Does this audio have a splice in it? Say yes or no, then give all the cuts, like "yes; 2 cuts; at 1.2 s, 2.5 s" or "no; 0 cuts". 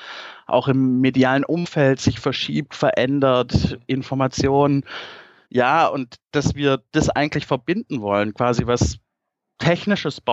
yes; 1 cut; at 5.5 s